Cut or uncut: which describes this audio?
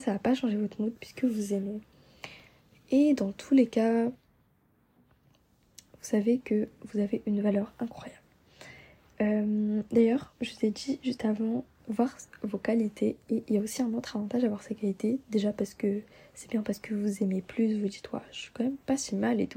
uncut